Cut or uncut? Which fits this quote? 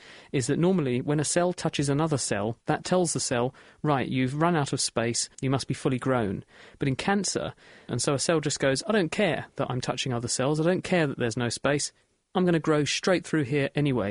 cut